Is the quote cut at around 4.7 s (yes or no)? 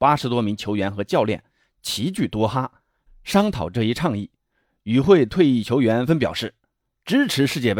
no